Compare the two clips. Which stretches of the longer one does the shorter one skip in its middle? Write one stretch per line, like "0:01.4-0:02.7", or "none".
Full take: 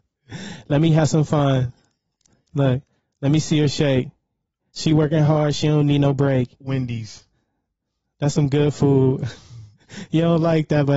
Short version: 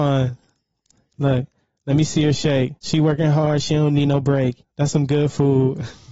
0:04.1-0:04.7
0:06.6-0:08.1